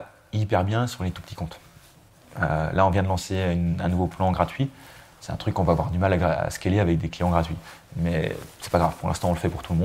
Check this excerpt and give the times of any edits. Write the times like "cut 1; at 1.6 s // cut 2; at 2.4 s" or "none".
none